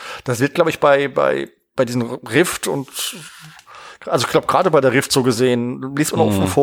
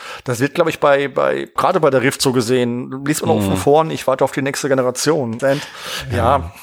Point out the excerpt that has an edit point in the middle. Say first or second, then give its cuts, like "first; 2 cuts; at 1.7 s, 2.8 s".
second; 2 cuts; at 1.6 s, 5.4 s